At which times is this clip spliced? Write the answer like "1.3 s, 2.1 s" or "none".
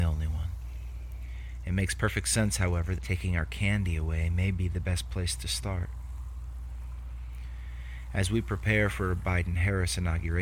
3.0 s